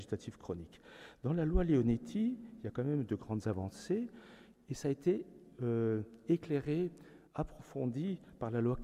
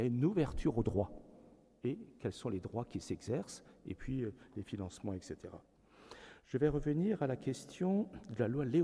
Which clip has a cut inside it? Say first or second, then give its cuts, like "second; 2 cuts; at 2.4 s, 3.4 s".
first; 1 cut; at 7.3 s